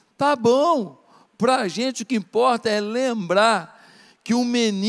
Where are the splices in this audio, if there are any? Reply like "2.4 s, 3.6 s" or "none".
none